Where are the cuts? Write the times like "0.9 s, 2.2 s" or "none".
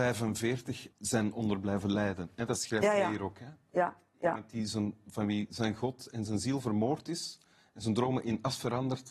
0.9 s